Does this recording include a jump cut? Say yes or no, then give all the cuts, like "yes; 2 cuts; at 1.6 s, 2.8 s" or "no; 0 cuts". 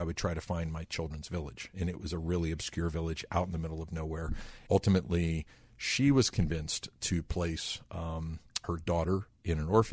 yes; 2 cuts; at 4.7 s, 8.6 s